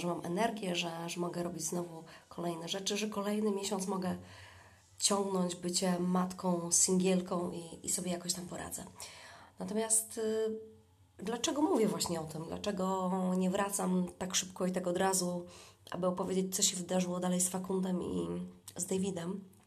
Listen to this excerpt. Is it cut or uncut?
uncut